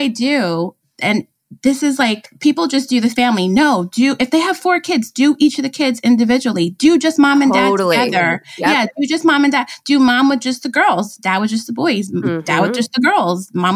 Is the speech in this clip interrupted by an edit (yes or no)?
no